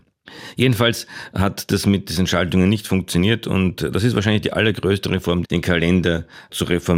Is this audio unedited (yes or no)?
no